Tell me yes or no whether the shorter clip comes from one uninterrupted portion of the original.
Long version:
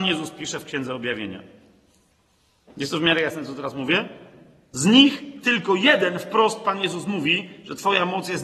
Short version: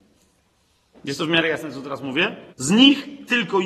no